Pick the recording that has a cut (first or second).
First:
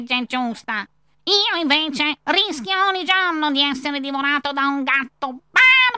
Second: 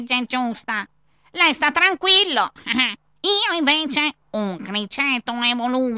first